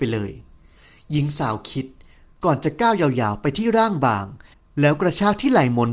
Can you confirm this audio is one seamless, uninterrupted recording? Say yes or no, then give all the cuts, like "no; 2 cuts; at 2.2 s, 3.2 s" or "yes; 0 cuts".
yes; 0 cuts